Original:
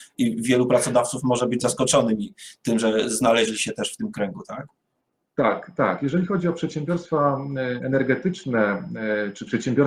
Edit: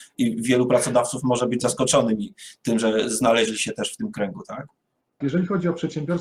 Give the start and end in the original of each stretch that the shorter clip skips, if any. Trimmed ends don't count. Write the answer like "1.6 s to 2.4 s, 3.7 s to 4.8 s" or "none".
5.2 s to 6.0 s